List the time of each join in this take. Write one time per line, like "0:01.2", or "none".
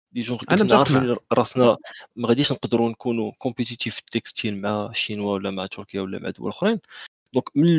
0:02.1